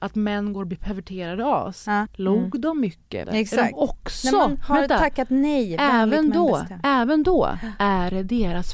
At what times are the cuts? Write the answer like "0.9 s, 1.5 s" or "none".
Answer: 2.0 s, 3.2 s